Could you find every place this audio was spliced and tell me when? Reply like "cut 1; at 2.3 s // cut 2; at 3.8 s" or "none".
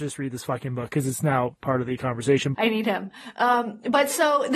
cut 1; at 2.5 s